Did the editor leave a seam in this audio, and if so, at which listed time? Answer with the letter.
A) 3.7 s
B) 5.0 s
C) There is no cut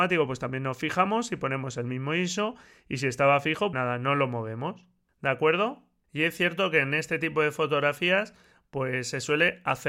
A